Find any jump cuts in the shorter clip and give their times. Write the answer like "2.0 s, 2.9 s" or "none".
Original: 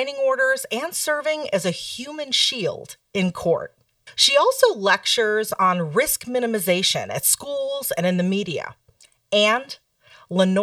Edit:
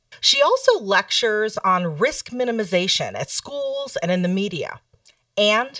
none